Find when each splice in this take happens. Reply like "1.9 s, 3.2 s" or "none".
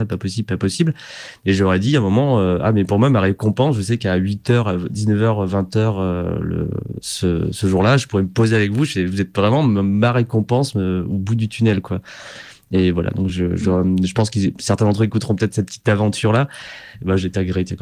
none